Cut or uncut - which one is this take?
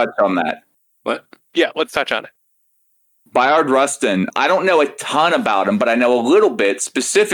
uncut